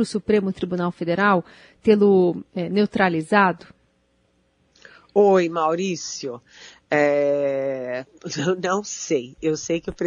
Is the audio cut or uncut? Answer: uncut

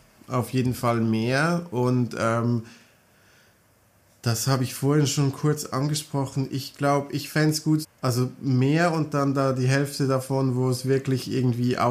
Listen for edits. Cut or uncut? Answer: cut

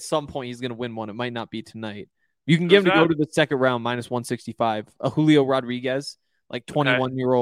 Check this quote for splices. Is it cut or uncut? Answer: uncut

